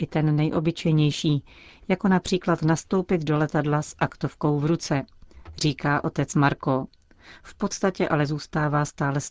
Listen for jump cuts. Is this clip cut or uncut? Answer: uncut